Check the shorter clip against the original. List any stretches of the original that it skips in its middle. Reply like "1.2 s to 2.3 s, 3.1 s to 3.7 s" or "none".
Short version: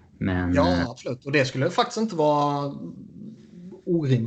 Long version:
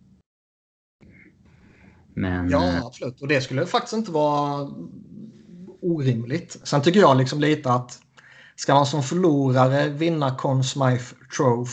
none